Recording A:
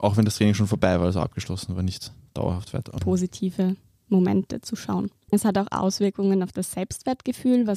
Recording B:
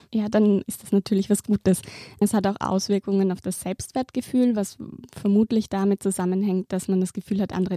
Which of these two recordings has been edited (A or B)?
A